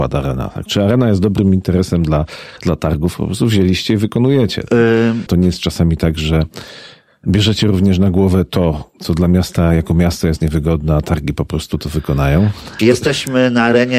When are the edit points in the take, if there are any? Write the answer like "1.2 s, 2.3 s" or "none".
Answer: 5.3 s, 12.8 s